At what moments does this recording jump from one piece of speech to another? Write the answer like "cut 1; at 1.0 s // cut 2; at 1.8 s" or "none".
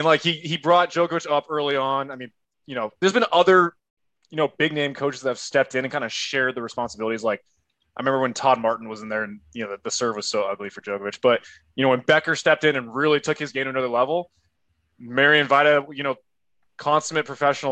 none